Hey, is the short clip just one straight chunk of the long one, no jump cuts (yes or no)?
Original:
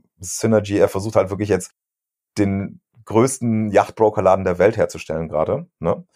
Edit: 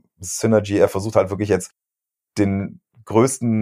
yes